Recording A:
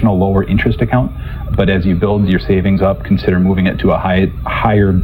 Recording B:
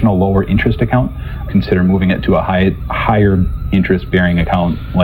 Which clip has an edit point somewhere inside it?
B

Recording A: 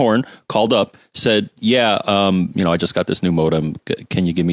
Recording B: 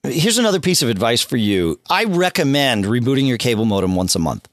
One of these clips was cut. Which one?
B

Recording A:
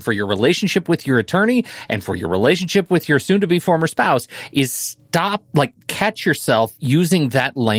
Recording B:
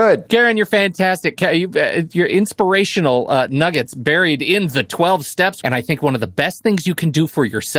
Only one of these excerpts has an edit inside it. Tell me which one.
B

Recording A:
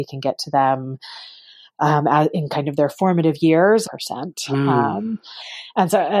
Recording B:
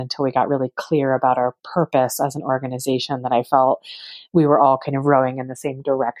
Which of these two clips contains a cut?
A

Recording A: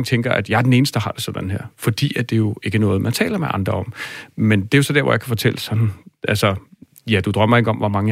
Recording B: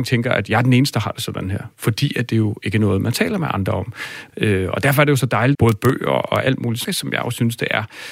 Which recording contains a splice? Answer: B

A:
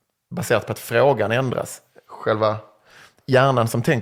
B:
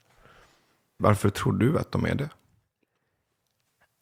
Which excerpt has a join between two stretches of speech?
B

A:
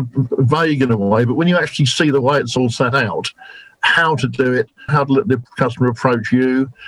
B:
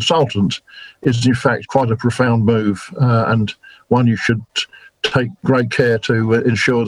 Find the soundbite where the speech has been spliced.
A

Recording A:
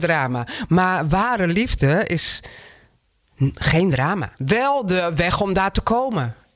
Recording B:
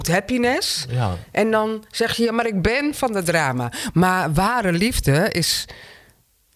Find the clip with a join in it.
A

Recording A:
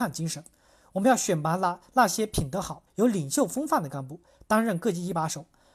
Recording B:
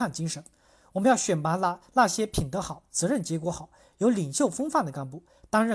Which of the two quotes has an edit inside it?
A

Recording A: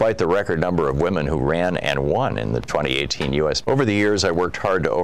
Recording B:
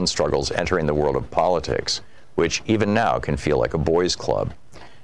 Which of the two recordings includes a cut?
A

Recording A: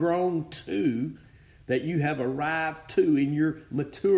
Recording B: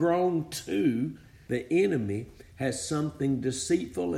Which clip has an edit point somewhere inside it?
B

